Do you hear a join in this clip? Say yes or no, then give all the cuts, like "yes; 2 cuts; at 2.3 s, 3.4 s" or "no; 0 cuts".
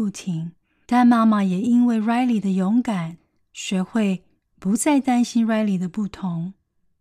no; 0 cuts